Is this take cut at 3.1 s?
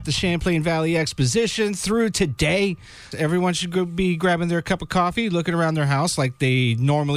yes; 1 cut; at 3.1 s

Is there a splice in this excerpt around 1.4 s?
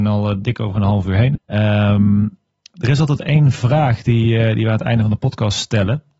yes; 1 cut; at 1.4 s

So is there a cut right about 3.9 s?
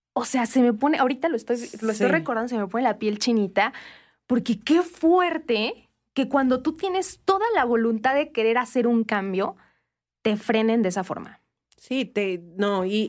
no; 0 cuts

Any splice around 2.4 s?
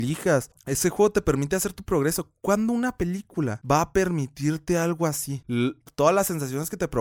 no; 1 cut; at 5.4 s

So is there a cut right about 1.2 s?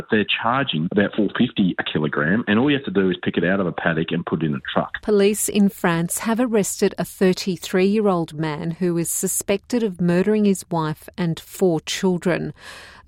yes; 1 cut; at 1.2 s

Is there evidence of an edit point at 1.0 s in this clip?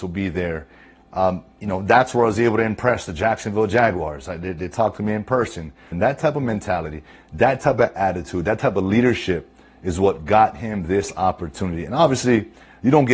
no; 1 cut; at 5.9 s

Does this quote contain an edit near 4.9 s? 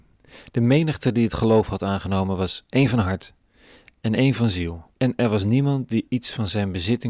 yes; 1 cut; at 4.9 s

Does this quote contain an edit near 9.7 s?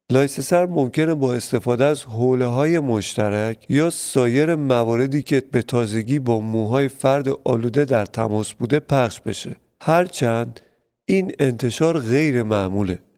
no; 0 cuts

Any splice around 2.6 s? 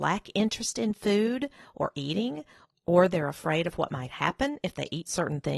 no; 0 cuts

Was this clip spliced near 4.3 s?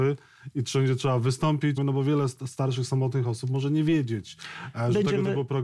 no; 1 cut; at 1.8 s

